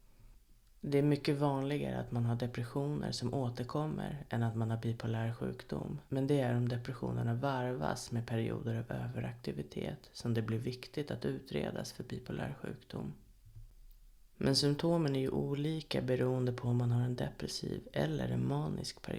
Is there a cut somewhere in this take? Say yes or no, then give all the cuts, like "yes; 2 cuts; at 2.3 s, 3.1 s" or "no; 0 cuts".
yes; 1 cut; at 6.1 s